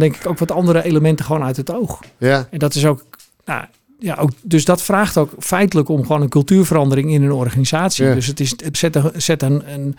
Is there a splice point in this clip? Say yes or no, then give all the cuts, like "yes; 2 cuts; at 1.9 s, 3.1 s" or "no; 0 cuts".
yes; 1 cut; at 8.7 s